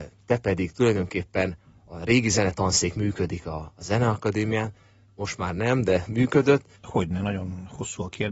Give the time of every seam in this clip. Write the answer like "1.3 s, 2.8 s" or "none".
6.7 s

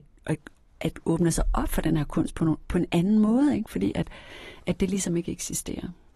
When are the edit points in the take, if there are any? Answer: none

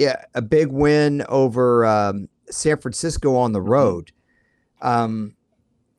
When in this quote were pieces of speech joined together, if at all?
none

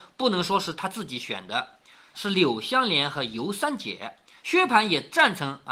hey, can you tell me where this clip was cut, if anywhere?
2.1 s

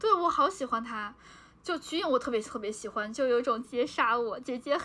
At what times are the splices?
3.6 s

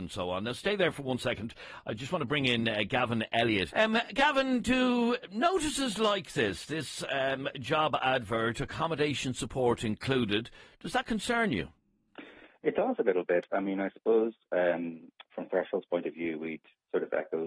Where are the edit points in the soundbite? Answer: 3.7 s

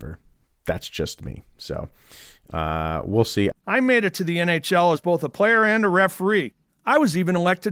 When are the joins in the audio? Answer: 3.5 s

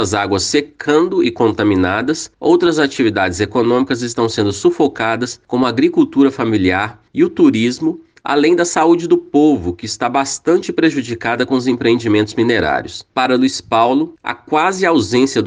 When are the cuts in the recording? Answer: 13.1 s

